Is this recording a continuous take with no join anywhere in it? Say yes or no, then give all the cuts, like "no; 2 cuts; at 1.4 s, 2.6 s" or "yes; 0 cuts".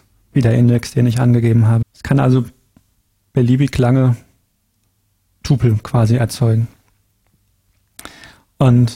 no; 1 cut; at 1.8 s